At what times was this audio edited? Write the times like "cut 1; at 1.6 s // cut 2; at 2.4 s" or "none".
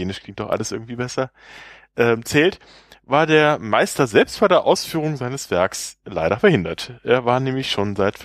none